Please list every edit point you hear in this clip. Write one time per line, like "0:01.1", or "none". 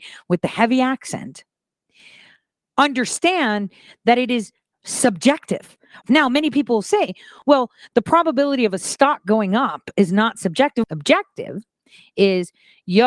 0:06.0
0:10.8